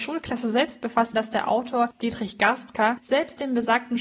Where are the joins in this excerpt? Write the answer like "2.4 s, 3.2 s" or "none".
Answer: 1.1 s